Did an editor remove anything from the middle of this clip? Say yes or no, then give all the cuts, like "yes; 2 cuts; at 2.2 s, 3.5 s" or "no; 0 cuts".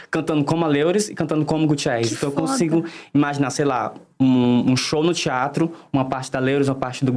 no; 0 cuts